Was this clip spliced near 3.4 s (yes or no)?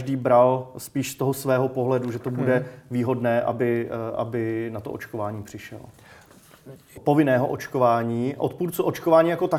no